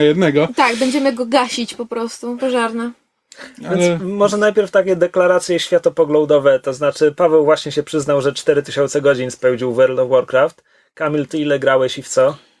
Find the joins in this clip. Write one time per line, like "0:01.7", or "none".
0:02.4